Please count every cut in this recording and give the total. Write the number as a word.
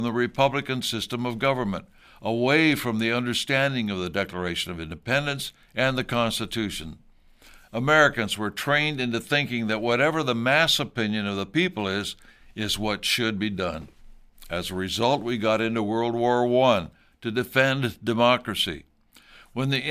one